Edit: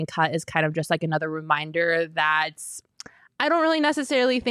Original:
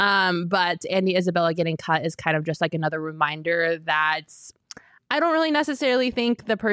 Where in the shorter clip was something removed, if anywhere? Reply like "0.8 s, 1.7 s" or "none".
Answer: none

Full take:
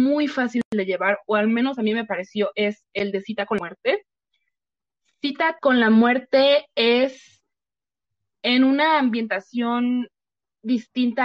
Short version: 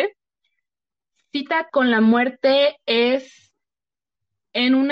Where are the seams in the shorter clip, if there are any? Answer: none

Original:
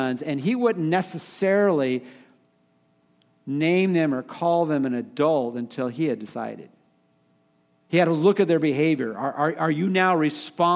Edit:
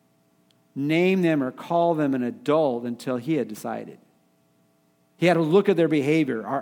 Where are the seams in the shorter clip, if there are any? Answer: none

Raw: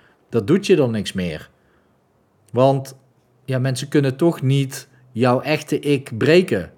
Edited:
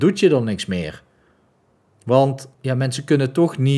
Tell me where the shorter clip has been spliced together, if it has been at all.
2.5 s

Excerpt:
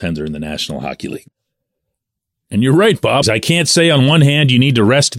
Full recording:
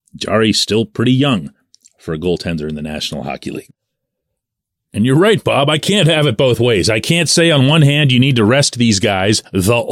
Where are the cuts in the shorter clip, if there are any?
3.2 s

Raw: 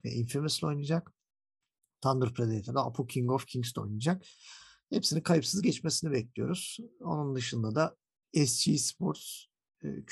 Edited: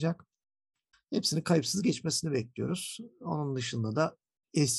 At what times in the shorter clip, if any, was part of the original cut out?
0.9 s

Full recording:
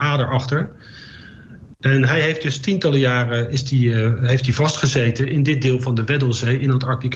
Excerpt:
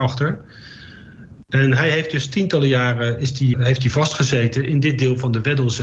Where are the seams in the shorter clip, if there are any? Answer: 3.5 s

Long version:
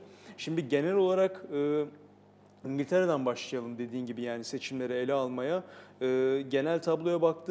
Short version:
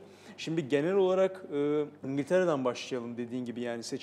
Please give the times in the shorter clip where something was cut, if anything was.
2.0 s

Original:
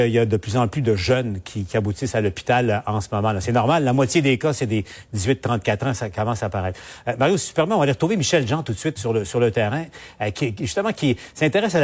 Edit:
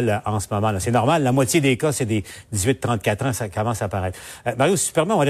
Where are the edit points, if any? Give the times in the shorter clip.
none

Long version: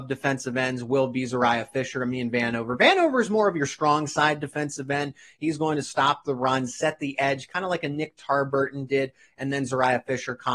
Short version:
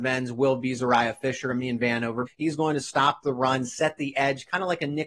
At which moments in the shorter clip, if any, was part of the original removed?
2.3 s

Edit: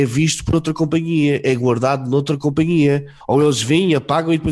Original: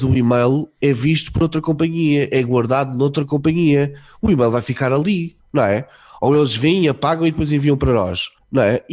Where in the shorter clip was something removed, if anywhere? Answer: 3.2 s

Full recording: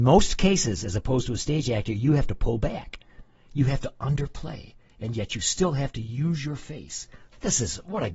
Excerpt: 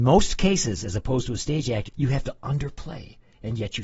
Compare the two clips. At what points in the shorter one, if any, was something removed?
1.9 s

